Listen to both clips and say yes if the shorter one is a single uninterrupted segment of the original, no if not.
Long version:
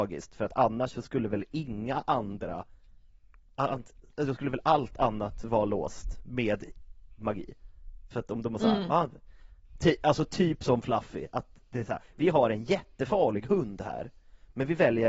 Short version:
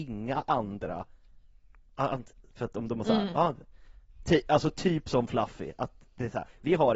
no